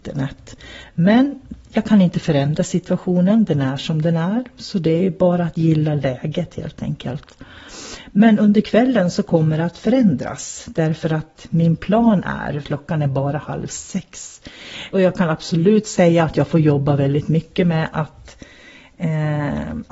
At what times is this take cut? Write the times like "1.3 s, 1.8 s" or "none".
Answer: 12.6 s, 14.9 s